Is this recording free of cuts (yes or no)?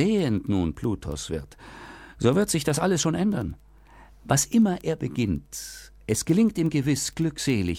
yes